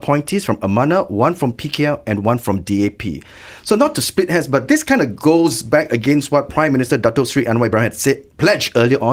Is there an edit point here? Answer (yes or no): no